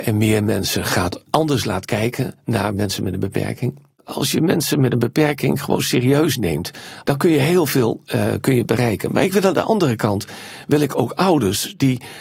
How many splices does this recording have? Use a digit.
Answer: 1